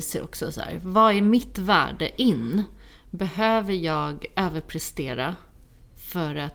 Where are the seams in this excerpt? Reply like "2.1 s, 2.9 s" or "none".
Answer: none